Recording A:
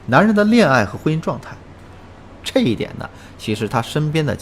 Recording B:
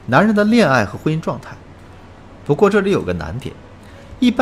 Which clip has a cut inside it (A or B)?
A